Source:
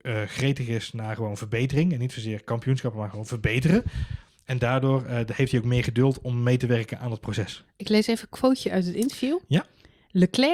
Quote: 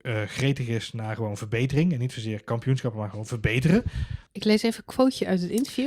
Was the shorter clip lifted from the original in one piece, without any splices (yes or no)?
no